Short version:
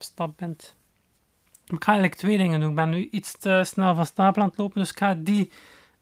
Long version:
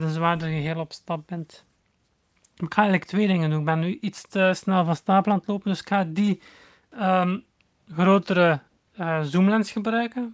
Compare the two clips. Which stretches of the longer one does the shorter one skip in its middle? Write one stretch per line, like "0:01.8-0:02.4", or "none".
none